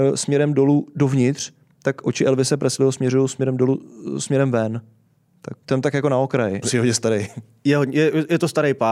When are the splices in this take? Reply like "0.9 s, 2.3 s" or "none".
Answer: 5.6 s, 6.6 s